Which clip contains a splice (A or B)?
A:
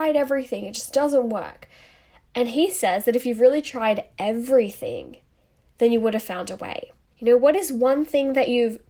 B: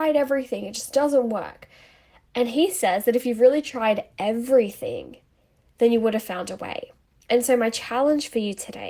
A